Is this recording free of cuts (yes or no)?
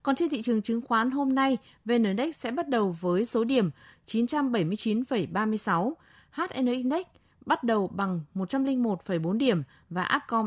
yes